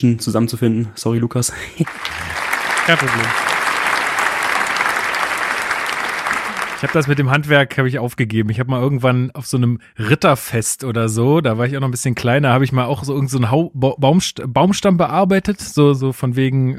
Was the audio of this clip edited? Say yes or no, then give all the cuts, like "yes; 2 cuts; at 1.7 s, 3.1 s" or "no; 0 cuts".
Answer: no; 0 cuts